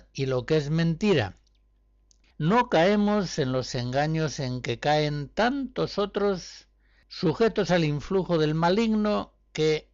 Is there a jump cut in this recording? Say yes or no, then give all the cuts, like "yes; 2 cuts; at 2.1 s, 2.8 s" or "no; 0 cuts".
no; 0 cuts